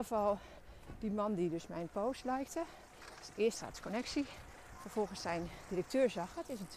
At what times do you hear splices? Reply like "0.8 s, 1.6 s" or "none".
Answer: none